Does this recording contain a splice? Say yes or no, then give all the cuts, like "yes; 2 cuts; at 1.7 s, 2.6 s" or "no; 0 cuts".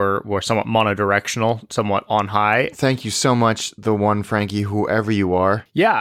yes; 1 cut; at 2.7 s